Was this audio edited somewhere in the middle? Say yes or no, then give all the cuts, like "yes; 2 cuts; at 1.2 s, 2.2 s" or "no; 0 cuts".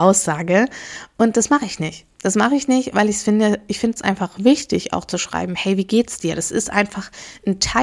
no; 0 cuts